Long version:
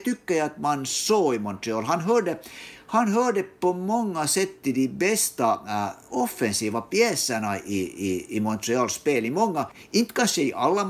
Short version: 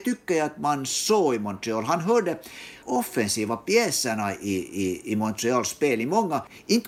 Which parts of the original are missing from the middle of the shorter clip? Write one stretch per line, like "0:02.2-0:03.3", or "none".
0:02.8-0:06.1